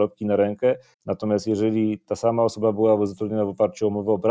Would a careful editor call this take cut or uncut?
cut